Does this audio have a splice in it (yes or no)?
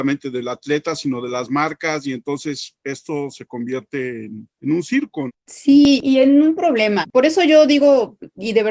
no